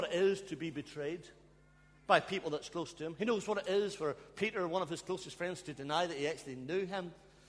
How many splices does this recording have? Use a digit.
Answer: 0